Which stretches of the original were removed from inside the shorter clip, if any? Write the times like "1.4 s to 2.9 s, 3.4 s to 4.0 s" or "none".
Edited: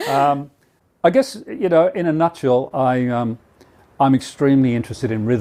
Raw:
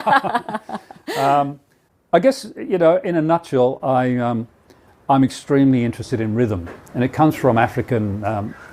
none